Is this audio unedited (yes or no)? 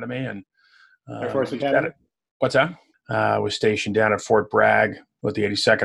no